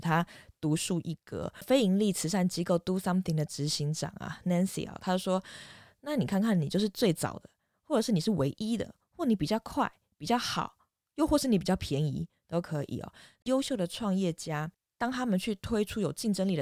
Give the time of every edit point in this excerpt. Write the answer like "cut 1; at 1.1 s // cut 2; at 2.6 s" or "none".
none